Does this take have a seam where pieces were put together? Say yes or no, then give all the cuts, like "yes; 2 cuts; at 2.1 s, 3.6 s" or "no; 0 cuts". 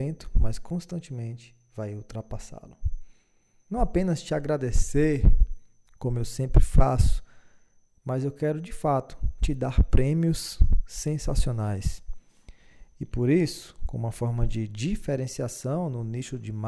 yes; 1 cut; at 3.7 s